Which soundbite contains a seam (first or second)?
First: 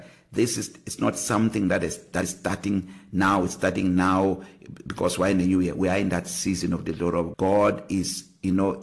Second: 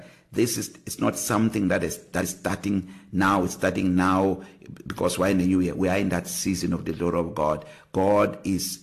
first